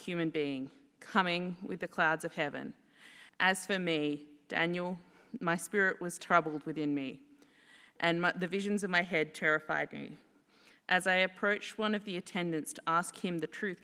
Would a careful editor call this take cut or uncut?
cut